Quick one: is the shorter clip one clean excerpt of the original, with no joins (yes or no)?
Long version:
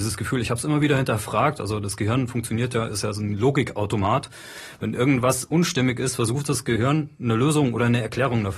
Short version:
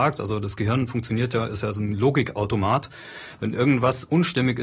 yes